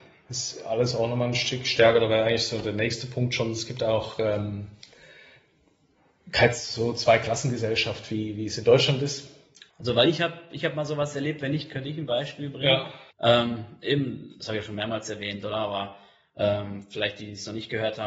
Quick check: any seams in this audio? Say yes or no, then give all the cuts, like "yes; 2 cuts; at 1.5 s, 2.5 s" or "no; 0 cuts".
yes; 2 cuts; at 9.7 s, 13.1 s